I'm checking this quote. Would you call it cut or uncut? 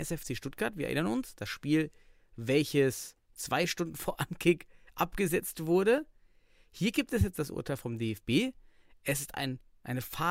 uncut